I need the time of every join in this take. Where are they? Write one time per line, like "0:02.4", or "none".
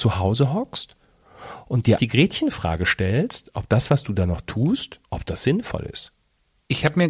0:02.0
0:05.0